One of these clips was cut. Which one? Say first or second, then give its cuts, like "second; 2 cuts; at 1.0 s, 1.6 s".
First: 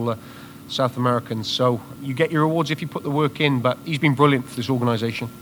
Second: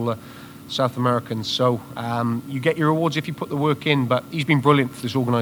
first; 1 cut; at 2.0 s